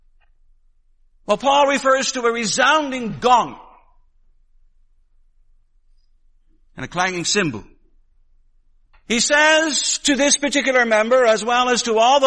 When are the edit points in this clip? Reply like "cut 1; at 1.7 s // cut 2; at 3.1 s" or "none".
cut 1; at 8.9 s